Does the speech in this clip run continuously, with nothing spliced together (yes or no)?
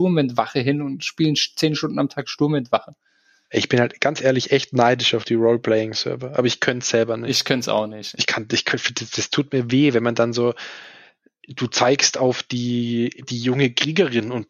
no